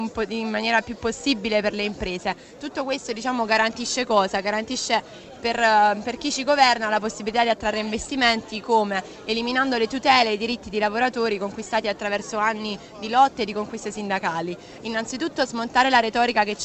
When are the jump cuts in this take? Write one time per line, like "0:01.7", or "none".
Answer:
0:14.8